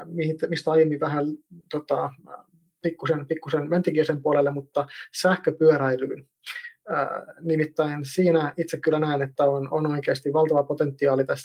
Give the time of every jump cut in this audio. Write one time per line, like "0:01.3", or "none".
0:01.6

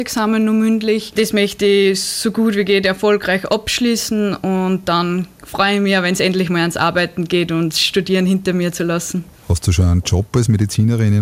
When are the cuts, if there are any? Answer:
none

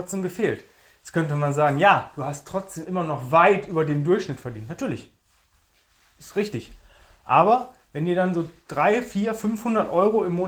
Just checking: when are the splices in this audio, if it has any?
none

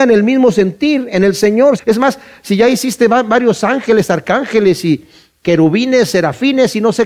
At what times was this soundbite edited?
0:01.8

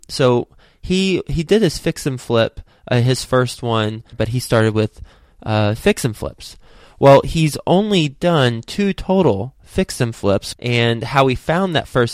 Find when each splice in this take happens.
0:04.1
0:10.5

